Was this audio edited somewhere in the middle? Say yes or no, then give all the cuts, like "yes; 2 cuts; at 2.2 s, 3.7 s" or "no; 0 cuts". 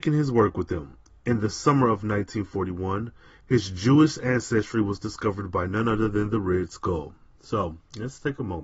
no; 0 cuts